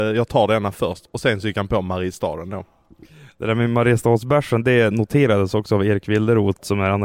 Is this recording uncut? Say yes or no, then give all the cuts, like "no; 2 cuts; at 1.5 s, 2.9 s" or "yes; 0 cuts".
yes; 0 cuts